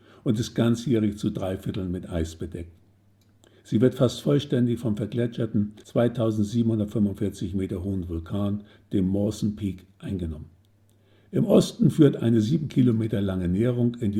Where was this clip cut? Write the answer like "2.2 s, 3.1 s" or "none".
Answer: none